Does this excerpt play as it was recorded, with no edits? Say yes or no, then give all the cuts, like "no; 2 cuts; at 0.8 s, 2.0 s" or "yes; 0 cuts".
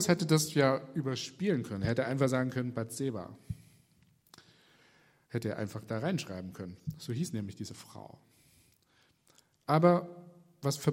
yes; 0 cuts